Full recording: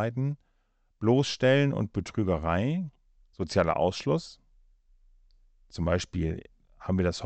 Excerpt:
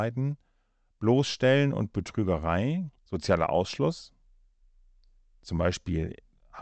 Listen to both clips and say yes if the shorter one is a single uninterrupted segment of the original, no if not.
no